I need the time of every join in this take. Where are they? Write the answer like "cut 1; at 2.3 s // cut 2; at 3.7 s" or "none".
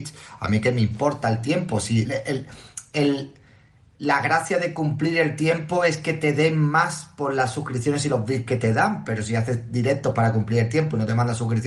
cut 1; at 2.0 s